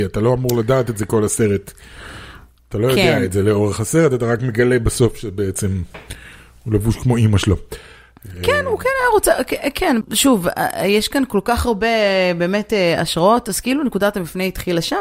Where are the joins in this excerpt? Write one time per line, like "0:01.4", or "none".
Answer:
0:10.0